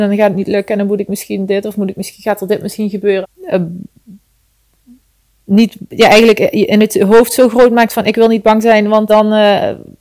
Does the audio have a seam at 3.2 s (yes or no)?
yes